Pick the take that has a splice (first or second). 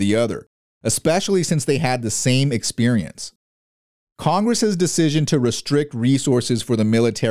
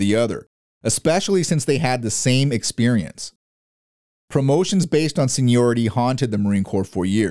first